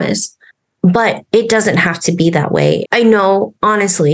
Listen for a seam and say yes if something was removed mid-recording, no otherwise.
yes